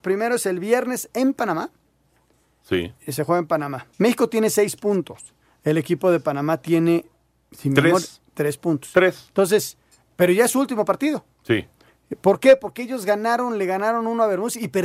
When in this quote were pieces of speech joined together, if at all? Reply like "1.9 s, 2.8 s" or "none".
3.9 s